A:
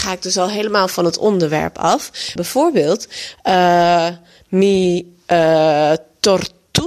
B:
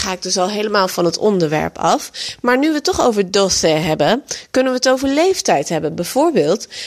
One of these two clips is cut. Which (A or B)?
A